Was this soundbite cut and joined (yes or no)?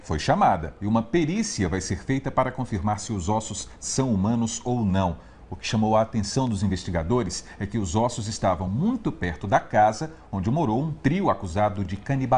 no